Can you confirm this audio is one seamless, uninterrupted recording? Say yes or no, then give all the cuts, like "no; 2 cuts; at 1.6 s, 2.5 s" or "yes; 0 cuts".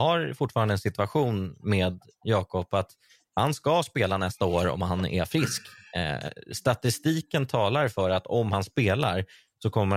yes; 0 cuts